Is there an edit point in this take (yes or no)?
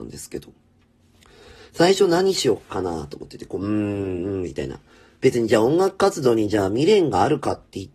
no